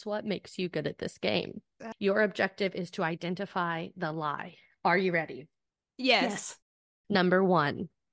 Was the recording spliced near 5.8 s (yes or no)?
no